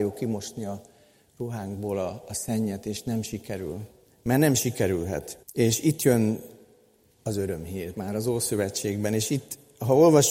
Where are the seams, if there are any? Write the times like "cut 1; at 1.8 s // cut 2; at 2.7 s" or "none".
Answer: cut 1; at 5.4 s // cut 2; at 7.9 s